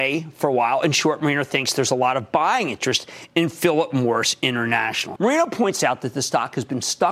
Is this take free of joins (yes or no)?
no